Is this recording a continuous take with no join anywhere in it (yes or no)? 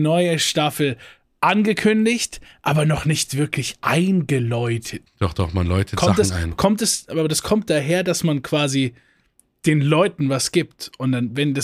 no